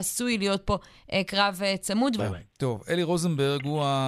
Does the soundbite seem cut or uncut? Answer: cut